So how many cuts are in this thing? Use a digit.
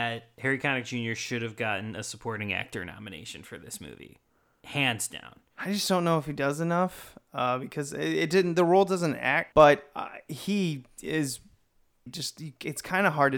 2